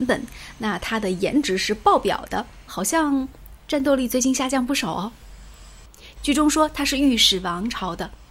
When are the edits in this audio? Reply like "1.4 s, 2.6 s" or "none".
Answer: 2.7 s, 6.2 s

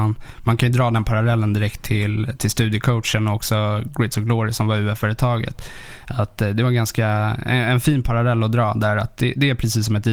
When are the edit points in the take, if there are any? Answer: none

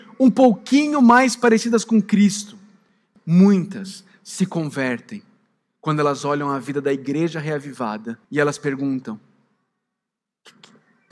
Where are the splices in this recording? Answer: 3.2 s, 8.2 s

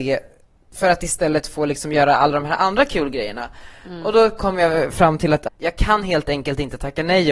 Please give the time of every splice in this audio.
5.5 s

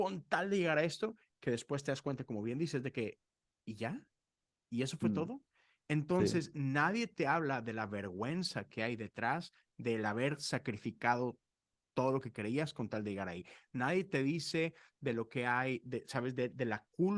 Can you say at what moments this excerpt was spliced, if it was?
5.8 s

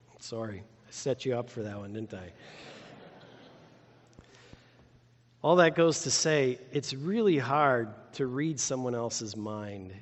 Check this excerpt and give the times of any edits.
none

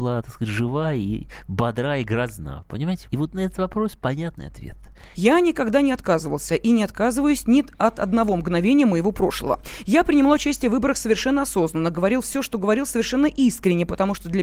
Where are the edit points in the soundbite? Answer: 3.0 s, 5.1 s

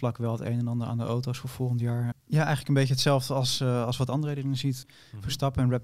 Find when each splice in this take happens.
2.1 s, 4.8 s

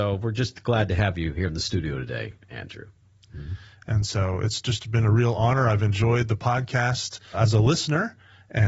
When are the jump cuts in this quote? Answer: 3.3 s, 7.3 s

